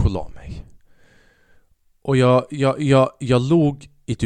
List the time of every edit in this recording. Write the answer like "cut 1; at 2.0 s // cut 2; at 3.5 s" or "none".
none